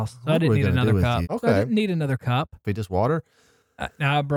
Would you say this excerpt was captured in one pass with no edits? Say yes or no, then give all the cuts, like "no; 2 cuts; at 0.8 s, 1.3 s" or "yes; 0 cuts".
no; 2 cuts; at 1.2 s, 2.6 s